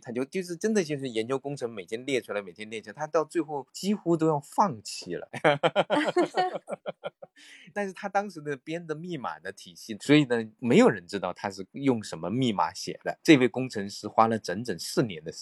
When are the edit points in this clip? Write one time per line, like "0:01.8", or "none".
0:05.3
0:10.0